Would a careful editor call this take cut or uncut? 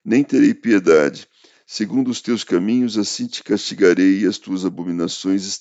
uncut